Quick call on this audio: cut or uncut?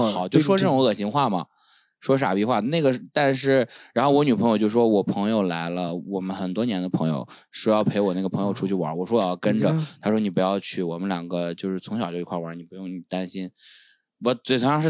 uncut